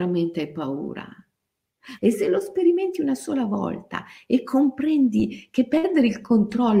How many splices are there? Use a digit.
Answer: 1